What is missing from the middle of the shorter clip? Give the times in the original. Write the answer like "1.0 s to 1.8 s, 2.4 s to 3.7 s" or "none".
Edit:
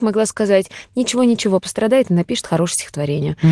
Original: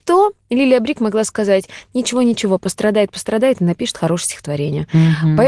2.6 s to 3.1 s